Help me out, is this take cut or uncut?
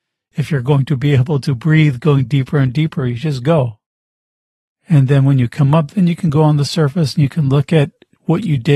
uncut